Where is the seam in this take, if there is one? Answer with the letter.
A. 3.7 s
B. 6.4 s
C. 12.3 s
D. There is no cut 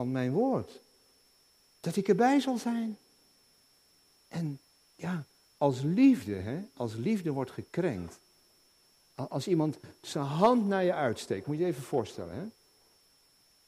D